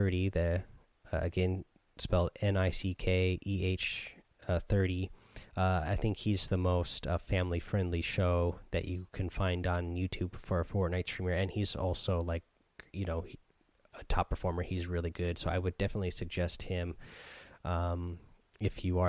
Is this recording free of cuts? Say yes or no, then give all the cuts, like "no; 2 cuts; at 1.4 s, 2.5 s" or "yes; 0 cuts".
yes; 0 cuts